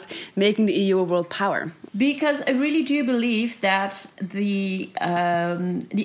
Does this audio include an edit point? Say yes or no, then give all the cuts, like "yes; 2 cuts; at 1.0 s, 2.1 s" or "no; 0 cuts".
yes; 1 cut; at 1.9 s